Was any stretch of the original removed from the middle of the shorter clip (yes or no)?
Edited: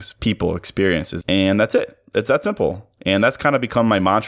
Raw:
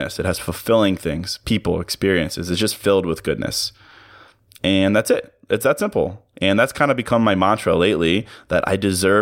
yes